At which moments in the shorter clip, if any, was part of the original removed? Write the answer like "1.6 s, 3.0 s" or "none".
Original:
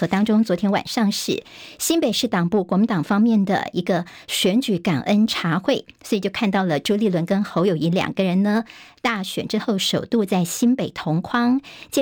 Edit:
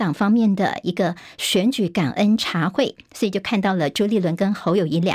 none